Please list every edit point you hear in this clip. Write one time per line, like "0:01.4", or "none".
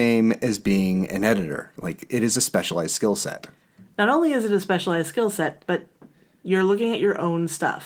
none